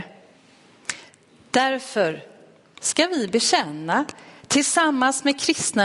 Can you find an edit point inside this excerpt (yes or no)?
no